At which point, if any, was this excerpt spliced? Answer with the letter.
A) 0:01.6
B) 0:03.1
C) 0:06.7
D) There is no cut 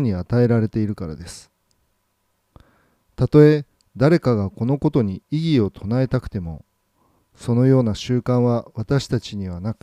D